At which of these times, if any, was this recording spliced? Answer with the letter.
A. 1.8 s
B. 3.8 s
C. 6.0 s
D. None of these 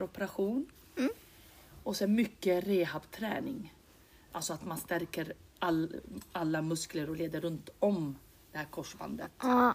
D